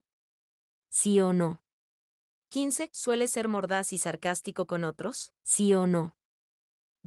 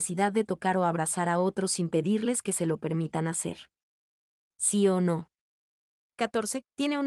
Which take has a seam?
first; 1 cut; at 5.4 s

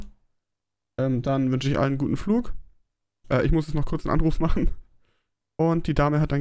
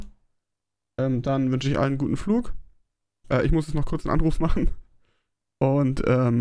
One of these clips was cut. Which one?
first; 1 cut; at 5.4 s

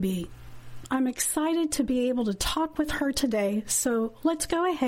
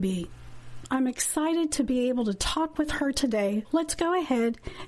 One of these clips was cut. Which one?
second; 1 cut; at 3.6 s

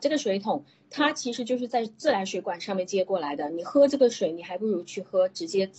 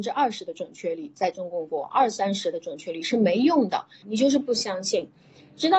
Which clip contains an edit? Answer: second; 1 cut; at 4.0 s

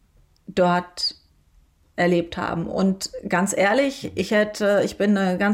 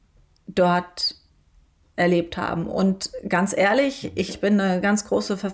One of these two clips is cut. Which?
second; 1 cut; at 4.3 s

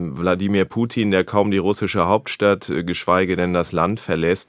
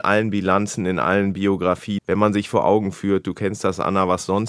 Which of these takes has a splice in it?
second; 1 cut; at 2.0 s

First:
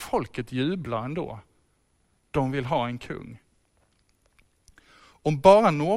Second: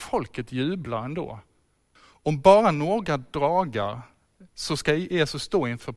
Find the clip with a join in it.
second; 1 cut; at 2.0 s

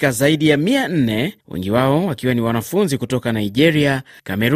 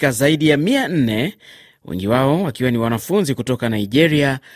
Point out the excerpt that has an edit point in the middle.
first; 1 cut; at 1.4 s

